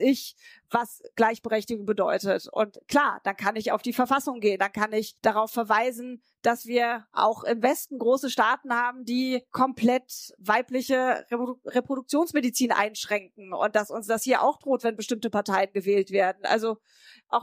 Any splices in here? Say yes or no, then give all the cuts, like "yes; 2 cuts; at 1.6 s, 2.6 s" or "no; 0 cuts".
yes; 1 cut; at 4.6 s